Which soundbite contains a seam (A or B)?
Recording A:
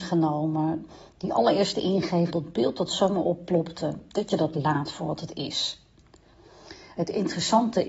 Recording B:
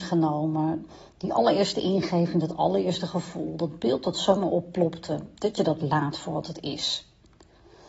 A